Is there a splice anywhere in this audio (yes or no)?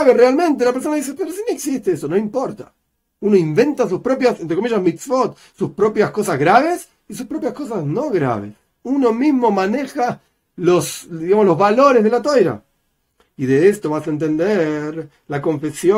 no